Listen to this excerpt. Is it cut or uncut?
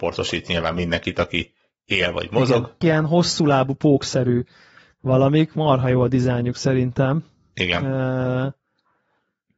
cut